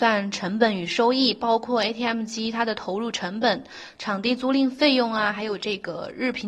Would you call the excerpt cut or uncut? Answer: uncut